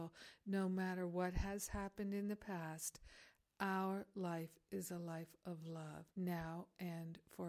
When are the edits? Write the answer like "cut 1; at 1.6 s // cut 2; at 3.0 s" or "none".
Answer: cut 1; at 6.1 s